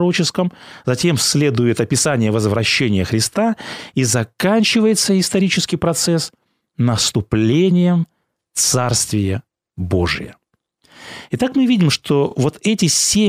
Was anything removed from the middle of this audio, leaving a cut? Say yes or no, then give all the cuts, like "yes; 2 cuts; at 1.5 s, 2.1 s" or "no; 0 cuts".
no; 0 cuts